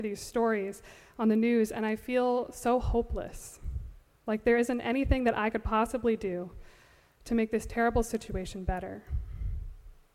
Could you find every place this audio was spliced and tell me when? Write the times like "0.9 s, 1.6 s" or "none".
none